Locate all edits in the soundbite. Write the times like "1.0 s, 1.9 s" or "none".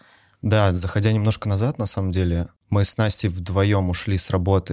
2.6 s